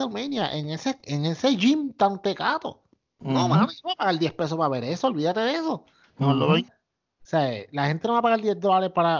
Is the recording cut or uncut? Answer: cut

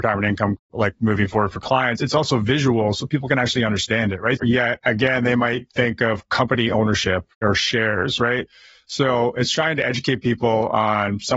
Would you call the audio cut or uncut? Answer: cut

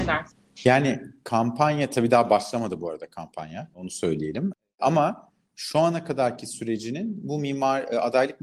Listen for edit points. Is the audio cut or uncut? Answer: uncut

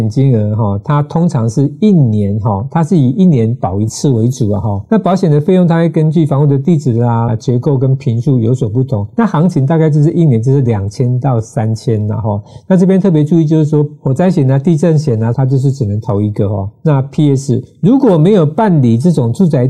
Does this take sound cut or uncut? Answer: cut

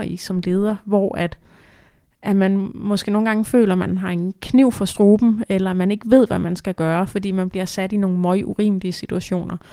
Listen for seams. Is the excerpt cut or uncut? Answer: uncut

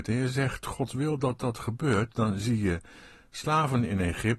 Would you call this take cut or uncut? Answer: uncut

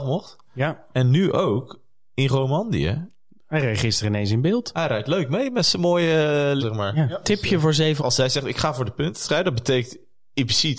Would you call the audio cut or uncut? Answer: cut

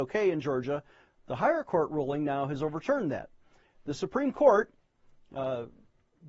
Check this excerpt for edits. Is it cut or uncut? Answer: uncut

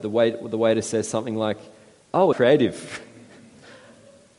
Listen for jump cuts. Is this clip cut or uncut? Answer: cut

